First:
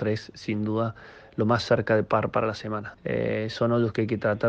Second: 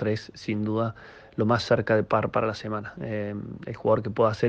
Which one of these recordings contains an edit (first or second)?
first